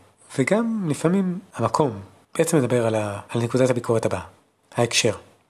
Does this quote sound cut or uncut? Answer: uncut